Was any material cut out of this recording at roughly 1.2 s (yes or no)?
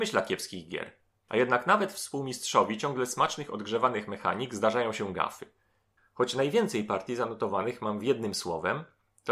yes